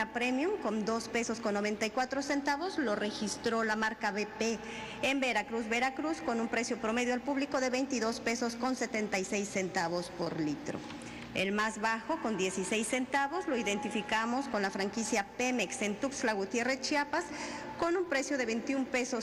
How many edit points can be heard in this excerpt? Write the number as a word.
zero